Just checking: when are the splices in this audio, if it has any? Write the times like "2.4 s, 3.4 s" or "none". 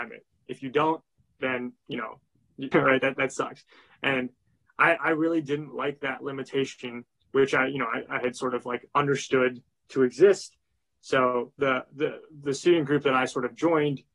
2.7 s

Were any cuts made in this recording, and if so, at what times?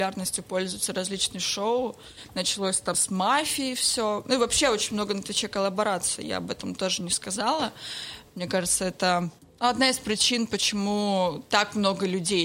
2.9 s

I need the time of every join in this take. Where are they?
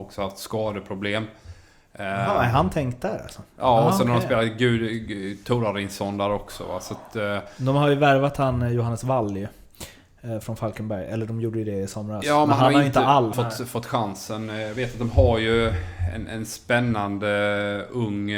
13.3 s

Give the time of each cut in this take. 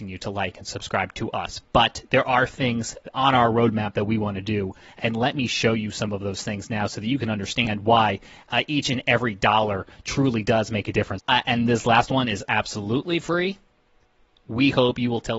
11.2 s

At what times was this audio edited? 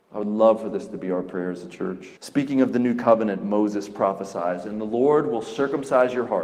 2.2 s

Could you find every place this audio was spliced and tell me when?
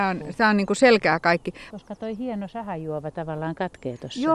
1.7 s

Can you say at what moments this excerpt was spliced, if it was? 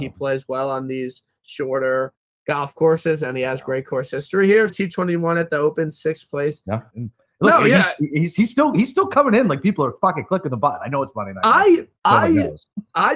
4.7 s, 6.9 s

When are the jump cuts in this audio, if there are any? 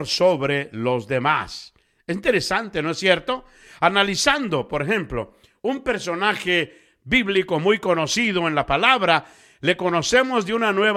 none

